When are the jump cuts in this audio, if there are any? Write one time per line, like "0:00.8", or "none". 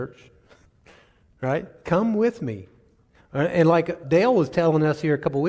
0:04.0